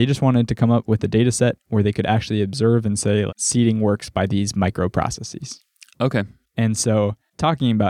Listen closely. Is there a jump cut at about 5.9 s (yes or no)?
no